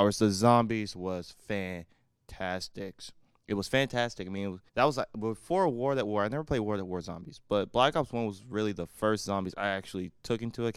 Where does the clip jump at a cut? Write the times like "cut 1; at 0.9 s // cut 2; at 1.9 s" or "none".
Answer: cut 1; at 4.7 s